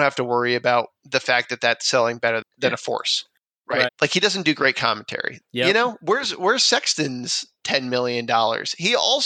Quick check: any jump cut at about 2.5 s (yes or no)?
yes